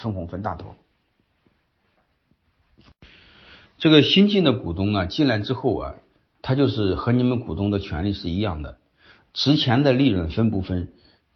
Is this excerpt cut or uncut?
uncut